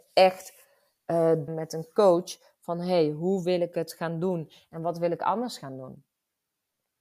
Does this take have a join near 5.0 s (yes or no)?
no